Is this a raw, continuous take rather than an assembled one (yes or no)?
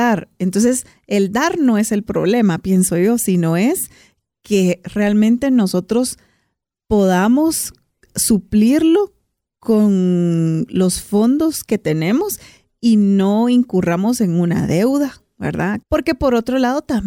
no